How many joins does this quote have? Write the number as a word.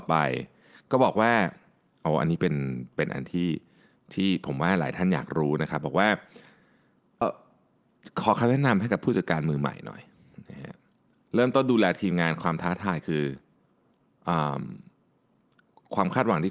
one